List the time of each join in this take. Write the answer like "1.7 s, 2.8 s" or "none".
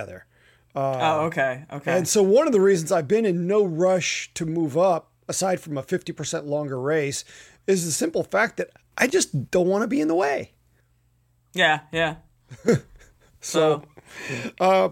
none

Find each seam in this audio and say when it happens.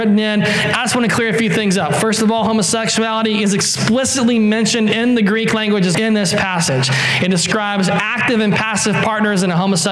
5.9 s

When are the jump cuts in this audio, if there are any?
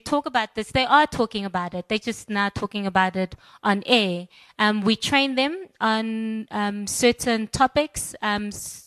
none

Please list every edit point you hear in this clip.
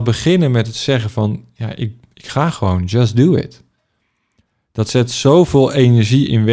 none

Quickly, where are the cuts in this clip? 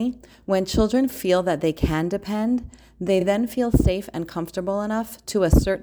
none

